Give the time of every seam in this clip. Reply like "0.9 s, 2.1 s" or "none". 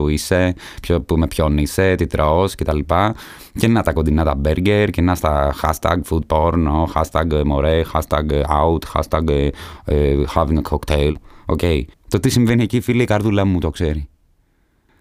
11.9 s